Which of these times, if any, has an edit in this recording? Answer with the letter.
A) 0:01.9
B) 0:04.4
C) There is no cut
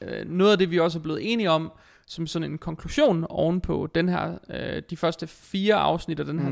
C